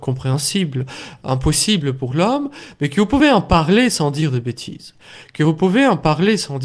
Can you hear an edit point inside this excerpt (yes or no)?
no